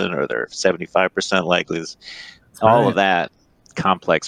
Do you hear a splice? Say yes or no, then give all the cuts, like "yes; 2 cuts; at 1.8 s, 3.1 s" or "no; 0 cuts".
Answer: no; 0 cuts